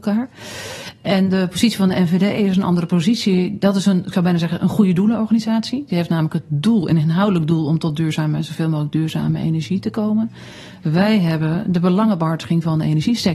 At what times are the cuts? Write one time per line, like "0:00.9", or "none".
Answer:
none